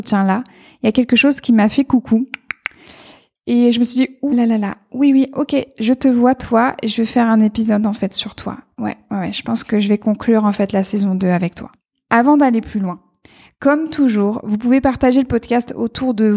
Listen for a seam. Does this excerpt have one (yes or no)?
yes